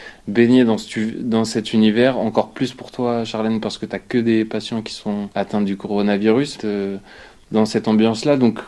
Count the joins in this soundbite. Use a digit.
2